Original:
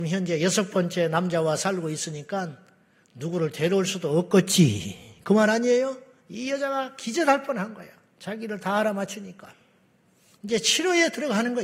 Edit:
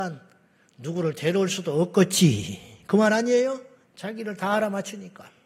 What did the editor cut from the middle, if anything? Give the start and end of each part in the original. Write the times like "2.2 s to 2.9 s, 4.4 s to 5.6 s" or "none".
6.2 s to 8.1 s